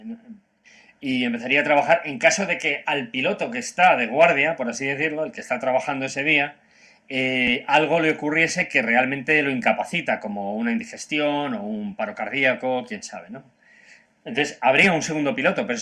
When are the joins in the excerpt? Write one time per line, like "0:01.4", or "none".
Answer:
none